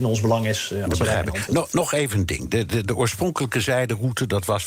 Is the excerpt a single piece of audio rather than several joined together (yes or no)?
yes